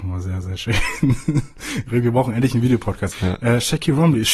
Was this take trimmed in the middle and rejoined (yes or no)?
yes